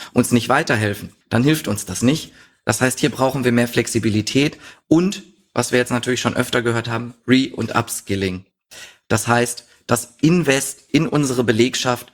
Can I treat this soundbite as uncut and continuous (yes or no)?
no